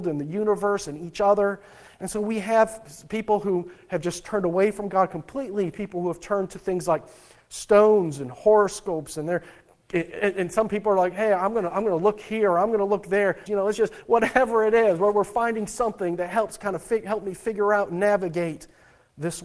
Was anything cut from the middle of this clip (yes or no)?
yes